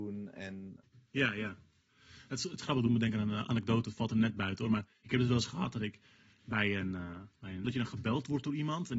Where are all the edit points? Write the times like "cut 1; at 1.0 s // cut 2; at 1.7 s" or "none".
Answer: cut 1; at 7.6 s